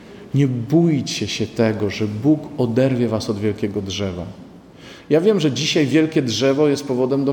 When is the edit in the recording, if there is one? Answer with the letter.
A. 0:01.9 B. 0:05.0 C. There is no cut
C